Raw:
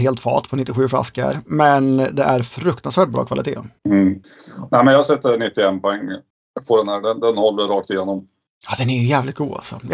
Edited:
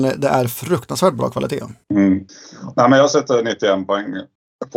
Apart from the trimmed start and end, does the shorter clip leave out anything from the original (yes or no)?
no